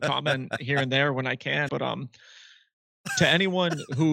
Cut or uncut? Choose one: cut